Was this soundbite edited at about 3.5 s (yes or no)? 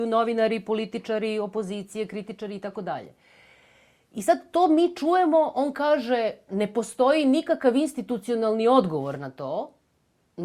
no